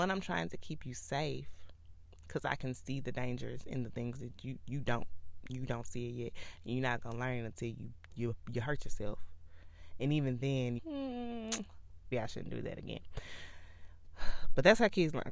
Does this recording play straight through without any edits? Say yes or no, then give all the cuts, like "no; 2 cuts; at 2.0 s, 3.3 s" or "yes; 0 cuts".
no; 2 cuts; at 10.8 s, 12.1 s